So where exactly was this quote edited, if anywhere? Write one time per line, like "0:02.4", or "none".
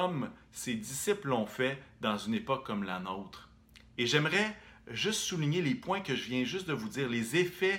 none